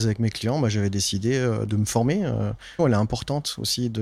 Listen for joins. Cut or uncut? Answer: cut